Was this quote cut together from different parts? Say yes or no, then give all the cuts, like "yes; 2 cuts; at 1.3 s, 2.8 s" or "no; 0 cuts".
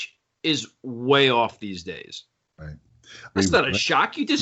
yes; 1 cut; at 3.4 s